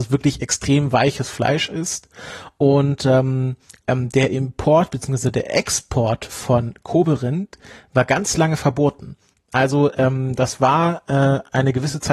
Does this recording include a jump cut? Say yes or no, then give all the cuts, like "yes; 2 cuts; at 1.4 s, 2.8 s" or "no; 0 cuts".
yes; 1 cut; at 3.8 s